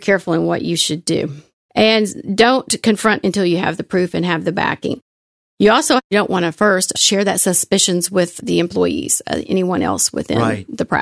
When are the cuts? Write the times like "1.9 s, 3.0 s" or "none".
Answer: 1.7 s